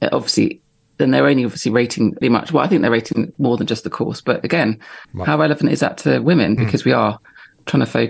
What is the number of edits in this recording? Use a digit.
3